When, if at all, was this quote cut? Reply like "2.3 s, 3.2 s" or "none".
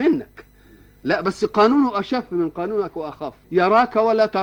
3.4 s